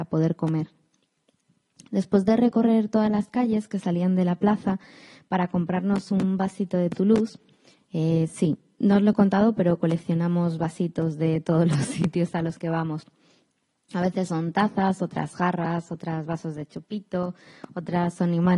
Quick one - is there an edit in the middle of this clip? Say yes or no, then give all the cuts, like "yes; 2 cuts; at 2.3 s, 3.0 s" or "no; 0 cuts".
no; 0 cuts